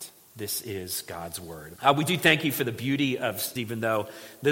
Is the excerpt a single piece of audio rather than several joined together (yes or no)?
no